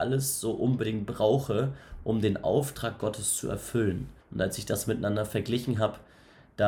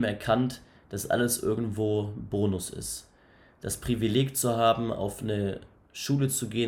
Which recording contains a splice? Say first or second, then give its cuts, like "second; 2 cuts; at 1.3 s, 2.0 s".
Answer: first; 1 cut; at 4.2 s